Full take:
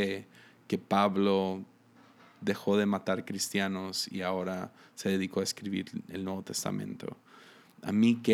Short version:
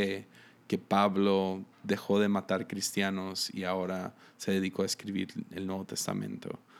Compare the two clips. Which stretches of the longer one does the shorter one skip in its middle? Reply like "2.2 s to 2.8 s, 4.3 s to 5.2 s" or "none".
1.7 s to 2.3 s